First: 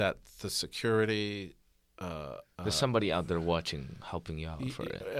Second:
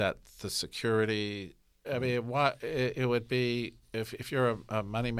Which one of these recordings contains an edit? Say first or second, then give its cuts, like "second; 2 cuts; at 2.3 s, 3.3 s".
second; 1 cut; at 1.8 s